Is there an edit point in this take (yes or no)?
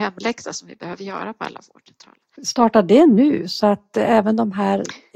yes